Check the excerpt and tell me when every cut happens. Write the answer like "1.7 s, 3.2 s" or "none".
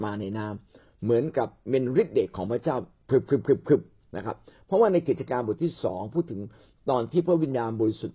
none